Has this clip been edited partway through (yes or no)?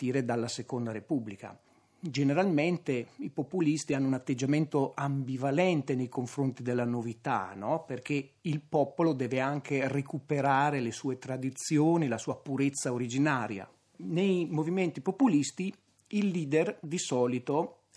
no